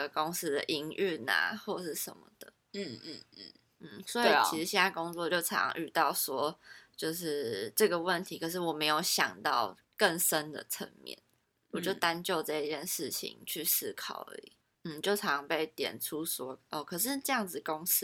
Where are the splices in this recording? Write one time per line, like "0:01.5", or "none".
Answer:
none